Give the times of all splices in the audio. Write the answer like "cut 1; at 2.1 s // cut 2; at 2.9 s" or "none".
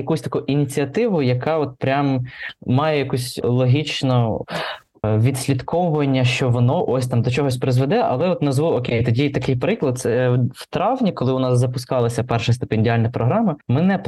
none